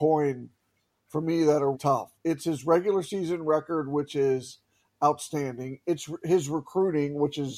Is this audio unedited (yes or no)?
no